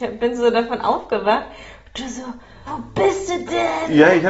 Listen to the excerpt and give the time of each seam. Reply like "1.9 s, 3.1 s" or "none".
2.7 s